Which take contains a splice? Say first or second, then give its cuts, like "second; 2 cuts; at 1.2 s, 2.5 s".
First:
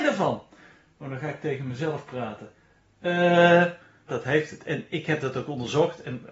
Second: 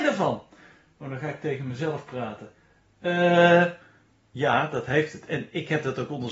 first; 1 cut; at 4.1 s